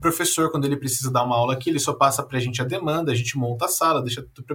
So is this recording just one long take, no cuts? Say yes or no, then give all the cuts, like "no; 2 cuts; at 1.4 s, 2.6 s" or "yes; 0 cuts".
yes; 0 cuts